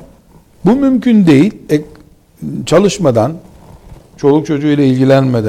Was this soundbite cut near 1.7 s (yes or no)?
yes